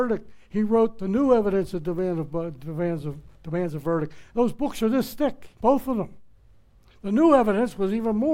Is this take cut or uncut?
cut